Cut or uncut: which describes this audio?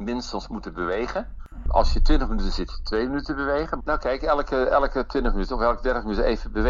cut